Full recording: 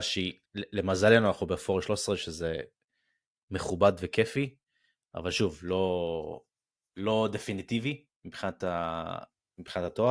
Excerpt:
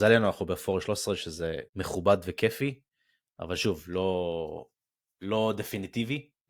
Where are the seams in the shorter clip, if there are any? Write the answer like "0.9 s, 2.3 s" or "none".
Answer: 1.7 s

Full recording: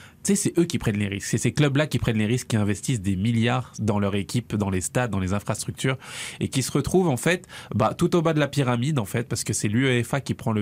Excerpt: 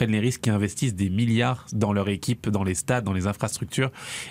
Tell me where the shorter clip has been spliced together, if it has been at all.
none

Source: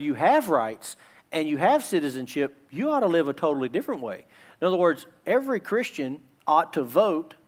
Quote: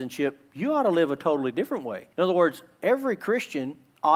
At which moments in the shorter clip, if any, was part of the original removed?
2.1 s

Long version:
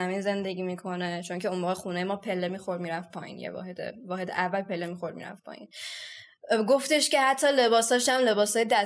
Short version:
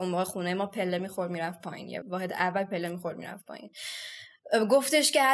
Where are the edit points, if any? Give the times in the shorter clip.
2.0 s

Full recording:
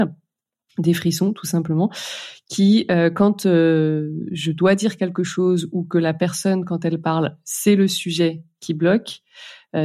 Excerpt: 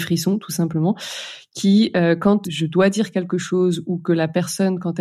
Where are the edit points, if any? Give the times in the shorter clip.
2.4 s

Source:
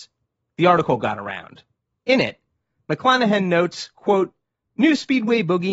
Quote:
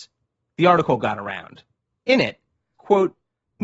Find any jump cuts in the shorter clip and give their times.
2.7 s

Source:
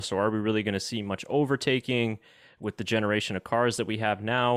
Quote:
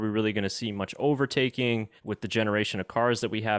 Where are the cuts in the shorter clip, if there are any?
2.0 s

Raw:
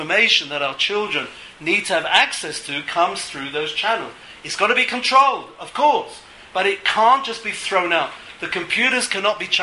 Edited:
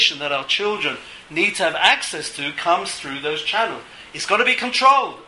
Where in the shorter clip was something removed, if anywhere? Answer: none

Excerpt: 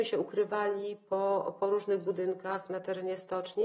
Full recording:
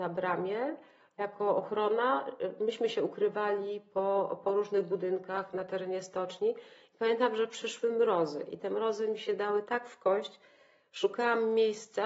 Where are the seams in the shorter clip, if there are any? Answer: none

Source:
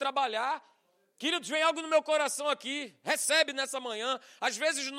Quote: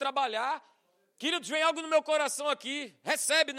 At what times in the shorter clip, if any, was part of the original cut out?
none

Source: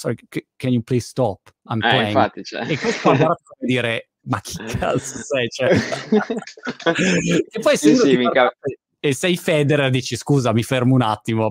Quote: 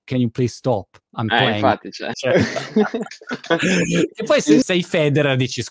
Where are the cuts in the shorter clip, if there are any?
2.1 s, 4.6 s

